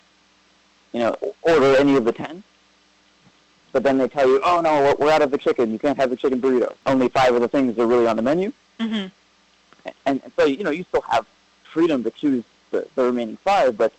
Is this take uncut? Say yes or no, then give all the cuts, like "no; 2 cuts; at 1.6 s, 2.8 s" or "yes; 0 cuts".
yes; 0 cuts